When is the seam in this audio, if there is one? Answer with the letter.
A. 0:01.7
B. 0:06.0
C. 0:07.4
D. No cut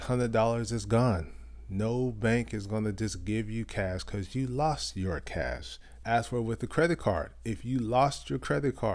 B